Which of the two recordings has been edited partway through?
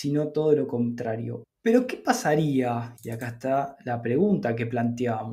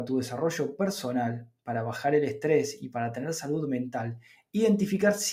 first; 2 cuts; at 1.4 s, 3.0 s

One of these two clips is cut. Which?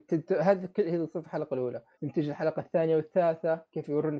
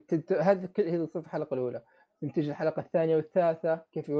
first; 1 cut; at 1.9 s

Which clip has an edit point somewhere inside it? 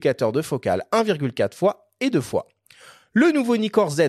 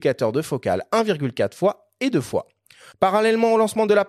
second; 1 cut; at 2.9 s

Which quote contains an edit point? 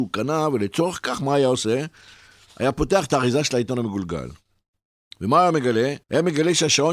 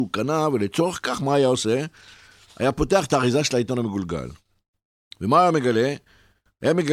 first; 1 cut; at 6.0 s

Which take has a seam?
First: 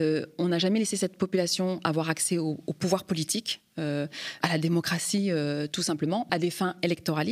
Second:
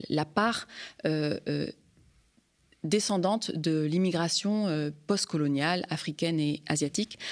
first; 2 cuts; at 4.4 s, 6.3 s

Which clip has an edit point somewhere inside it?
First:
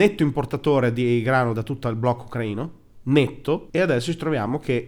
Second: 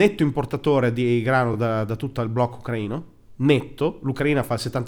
first; 2 cuts; at 1.5 s, 3.7 s

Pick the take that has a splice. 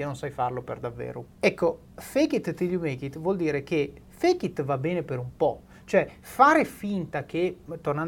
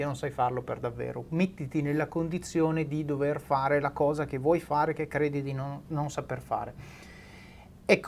first; 1 cut; at 1.3 s

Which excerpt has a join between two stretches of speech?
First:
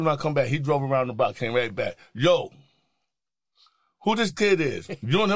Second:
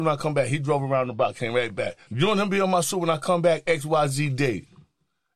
second; 1 cut; at 2.1 s

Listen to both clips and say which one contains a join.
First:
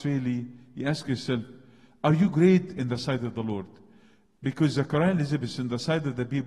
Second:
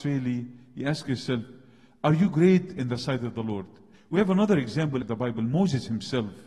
second; 2 cuts; at 3.9 s, 5.0 s

